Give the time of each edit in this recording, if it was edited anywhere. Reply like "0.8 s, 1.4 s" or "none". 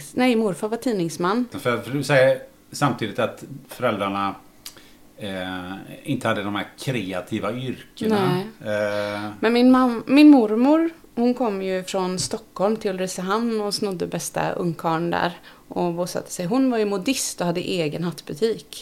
1.5 s